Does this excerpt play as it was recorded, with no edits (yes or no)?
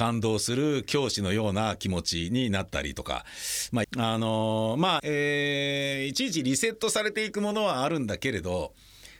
no